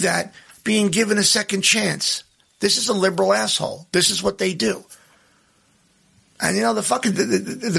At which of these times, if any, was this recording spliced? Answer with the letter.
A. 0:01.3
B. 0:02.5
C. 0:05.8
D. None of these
D